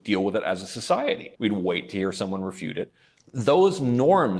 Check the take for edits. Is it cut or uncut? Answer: cut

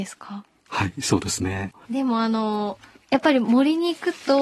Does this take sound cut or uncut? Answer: cut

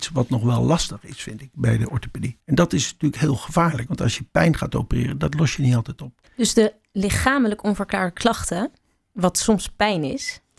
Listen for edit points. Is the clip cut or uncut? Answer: cut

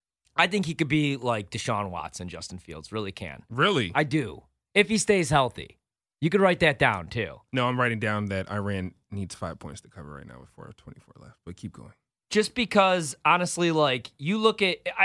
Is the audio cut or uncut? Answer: uncut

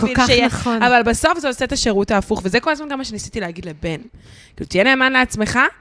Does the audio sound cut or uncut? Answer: uncut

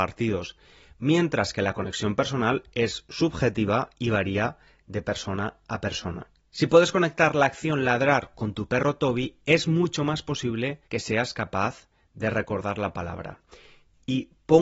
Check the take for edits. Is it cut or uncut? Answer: cut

